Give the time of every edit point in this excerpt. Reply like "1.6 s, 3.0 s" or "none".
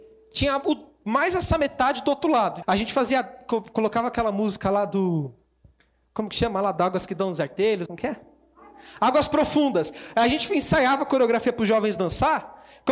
2.6 s, 7.9 s